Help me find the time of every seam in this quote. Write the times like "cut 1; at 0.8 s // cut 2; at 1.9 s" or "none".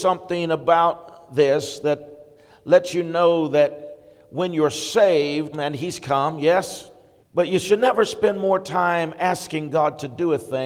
cut 1; at 5.5 s // cut 2; at 7.2 s